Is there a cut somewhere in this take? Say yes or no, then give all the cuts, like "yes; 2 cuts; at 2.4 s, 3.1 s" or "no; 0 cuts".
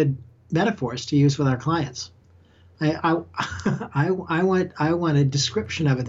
no; 0 cuts